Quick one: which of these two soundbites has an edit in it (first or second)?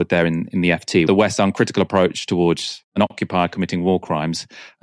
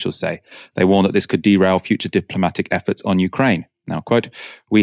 first